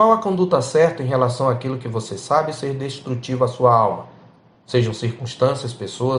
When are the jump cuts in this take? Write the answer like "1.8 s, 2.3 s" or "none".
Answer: none